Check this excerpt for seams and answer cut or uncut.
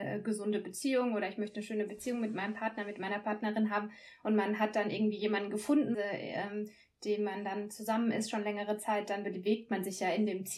cut